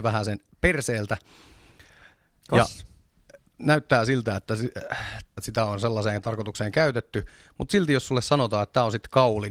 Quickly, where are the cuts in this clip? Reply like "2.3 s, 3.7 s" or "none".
3.5 s, 5.4 s